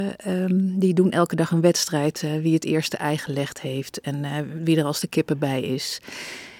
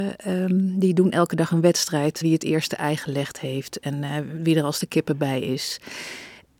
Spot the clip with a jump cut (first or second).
second